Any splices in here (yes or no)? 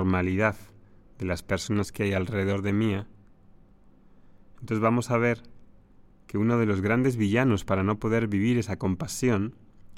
no